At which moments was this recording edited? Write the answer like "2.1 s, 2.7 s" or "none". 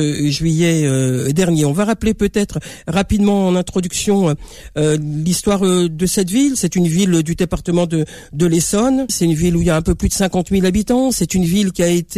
9.1 s

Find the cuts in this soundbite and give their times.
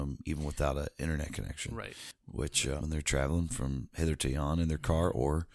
2.8 s

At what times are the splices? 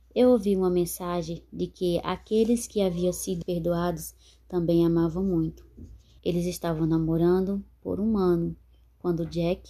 3.4 s, 6.2 s

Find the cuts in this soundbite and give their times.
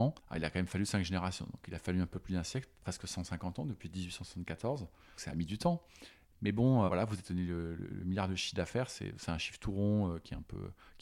5.2 s, 6.9 s

